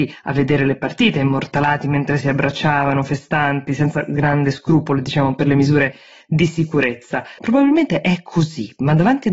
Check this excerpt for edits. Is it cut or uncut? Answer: cut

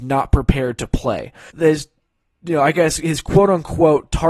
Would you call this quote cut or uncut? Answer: cut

